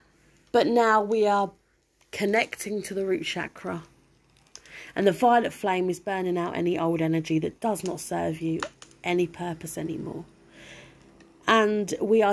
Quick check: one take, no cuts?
yes; 0 cuts

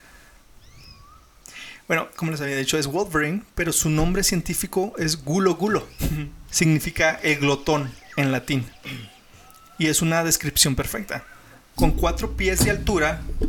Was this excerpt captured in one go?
no; 2 cuts; at 2.1 s, 6.5 s

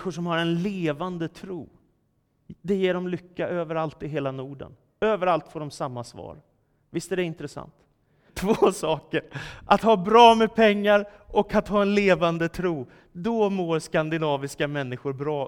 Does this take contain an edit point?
yes; 1 cut; at 8.3 s

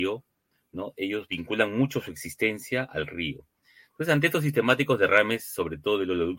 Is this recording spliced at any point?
no; 0 cuts

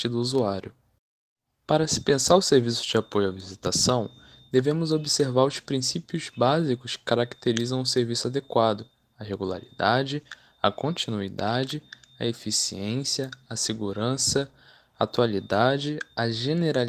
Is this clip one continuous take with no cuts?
yes; 0 cuts

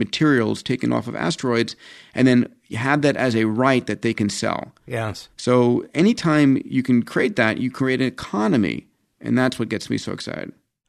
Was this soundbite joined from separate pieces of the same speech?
no; 0 cuts

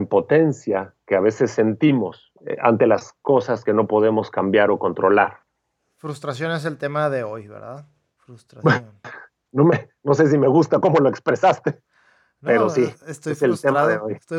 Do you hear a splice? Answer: no; 0 cuts

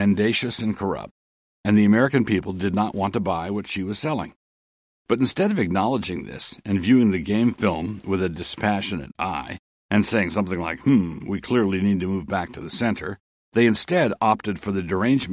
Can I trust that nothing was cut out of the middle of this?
yes; 0 cuts

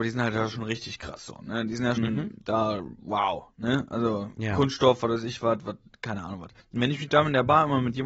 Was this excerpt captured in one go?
no; 2 cuts; at 2.0 s, 6.6 s

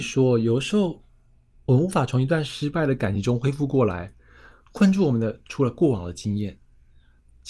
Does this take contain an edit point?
no; 0 cuts

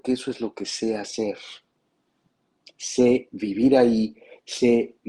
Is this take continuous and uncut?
yes; 0 cuts

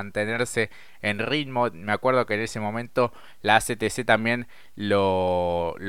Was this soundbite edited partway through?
no; 0 cuts

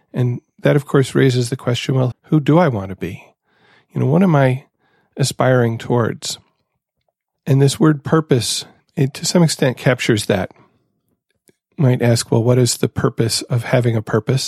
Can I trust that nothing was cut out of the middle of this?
no; 1 cut; at 2.1 s

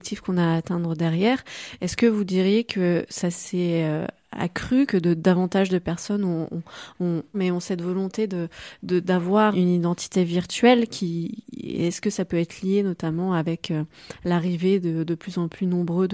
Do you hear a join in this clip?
yes; 2 cuts; at 7.3 s, 9.5 s

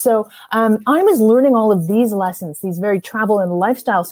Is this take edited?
no; 0 cuts

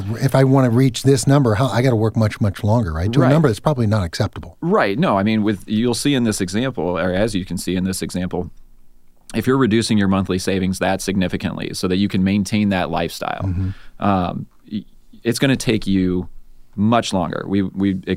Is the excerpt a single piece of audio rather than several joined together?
yes; 0 cuts

